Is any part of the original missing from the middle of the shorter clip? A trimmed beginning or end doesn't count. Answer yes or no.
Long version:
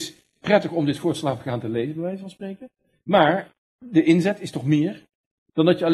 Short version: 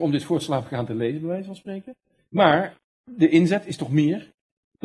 no